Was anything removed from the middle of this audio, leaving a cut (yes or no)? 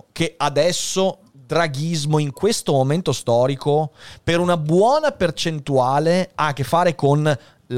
no